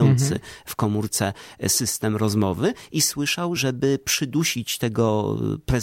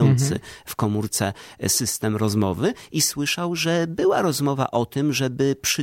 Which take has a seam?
first; 1 cut; at 3.6 s

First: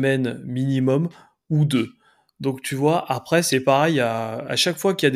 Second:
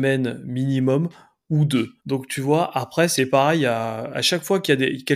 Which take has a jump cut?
second; 1 cut; at 2.0 s

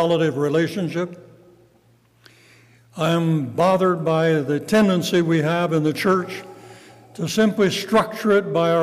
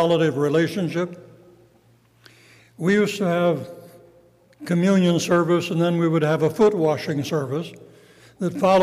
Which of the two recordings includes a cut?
second; 1 cut; at 2.6 s

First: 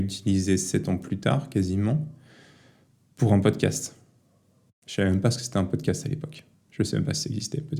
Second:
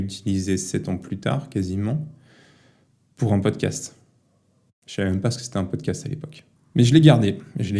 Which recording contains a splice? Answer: second; 1 cut; at 6.6 s

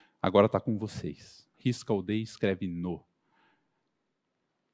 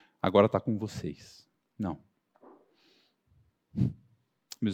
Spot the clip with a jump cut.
first; 1 cut; at 1.5 s

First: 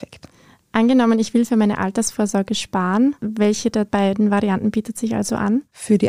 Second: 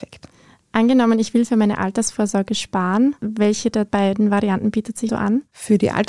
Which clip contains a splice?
second; 1 cut; at 5.1 s

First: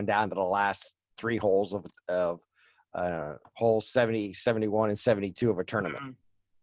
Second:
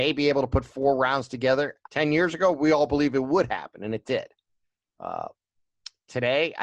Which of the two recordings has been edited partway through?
second; 1 cut; at 1.8 s

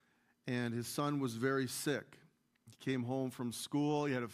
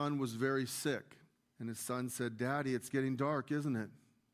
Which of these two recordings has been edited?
second; 1 cut; at 1.4 s

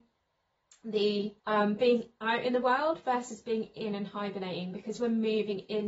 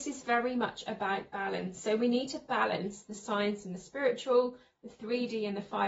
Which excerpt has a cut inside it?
first; 1 cut; at 1.4 s

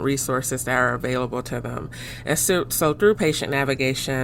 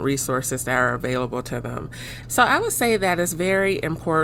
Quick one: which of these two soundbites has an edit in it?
second; 1 cut; at 2.2 s

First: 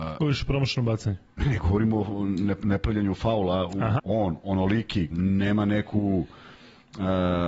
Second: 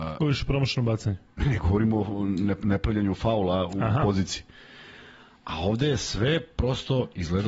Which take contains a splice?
first; 2 cuts; at 4.0 s, 5.1 s

